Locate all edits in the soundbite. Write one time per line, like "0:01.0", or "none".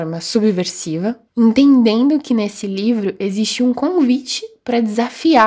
0:01.3